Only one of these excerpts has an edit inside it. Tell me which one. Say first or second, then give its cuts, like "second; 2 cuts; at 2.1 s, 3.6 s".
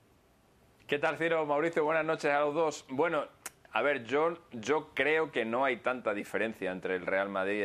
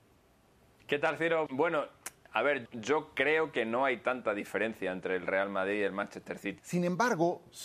second; 3 cuts; at 1.5 s, 2.7 s, 6.6 s